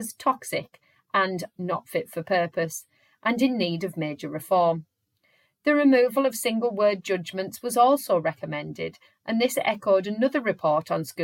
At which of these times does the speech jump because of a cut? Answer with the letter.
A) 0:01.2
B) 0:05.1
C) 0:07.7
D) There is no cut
D